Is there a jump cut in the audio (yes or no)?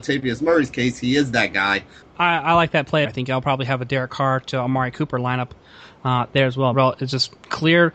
yes